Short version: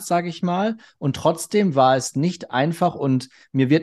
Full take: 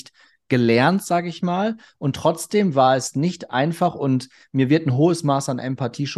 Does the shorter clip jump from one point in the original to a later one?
no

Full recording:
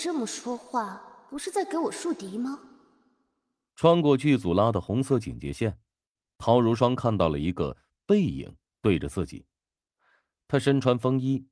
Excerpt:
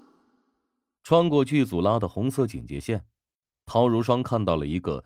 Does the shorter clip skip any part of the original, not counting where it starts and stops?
no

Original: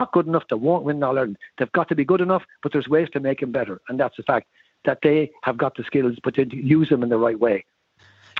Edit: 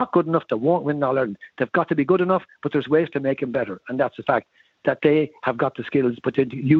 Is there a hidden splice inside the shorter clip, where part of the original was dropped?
no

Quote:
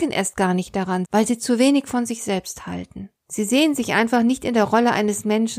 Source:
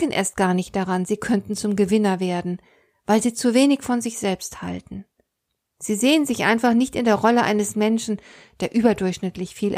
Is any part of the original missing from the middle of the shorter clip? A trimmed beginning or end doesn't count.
yes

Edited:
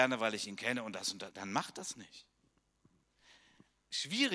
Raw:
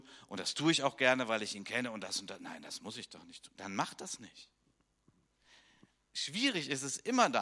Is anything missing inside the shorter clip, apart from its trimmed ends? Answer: yes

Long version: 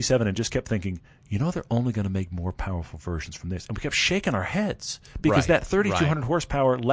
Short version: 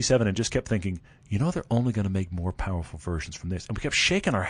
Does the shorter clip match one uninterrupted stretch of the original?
yes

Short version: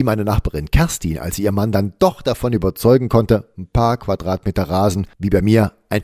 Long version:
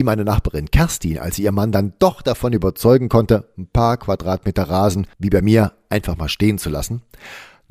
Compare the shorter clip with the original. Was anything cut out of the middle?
no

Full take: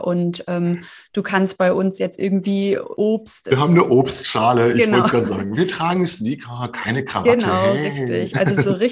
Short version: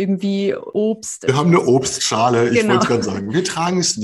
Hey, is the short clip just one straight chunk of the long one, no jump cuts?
yes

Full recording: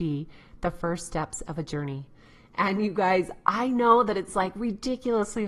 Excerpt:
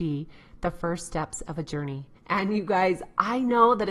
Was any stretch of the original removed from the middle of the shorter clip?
yes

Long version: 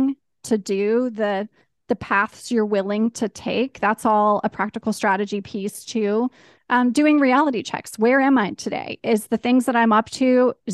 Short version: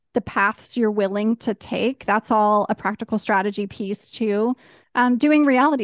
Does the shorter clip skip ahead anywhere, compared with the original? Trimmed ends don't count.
no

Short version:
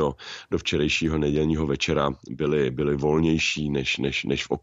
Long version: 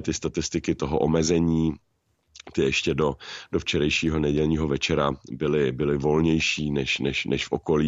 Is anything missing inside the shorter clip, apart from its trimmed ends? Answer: no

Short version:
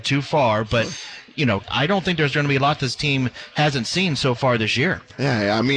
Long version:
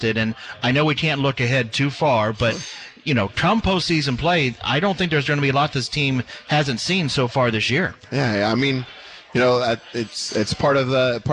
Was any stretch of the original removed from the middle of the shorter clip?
yes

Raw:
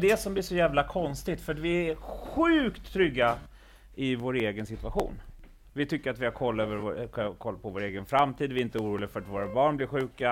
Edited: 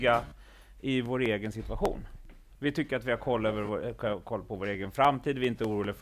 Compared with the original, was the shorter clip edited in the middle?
no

